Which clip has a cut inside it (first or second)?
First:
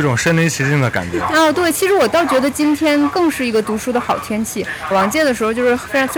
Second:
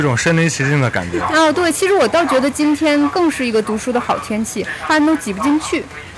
second